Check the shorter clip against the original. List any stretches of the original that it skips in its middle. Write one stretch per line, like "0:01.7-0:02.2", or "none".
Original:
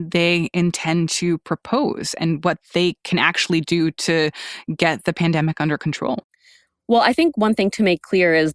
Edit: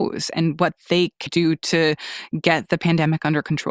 0:03.1-0:03.6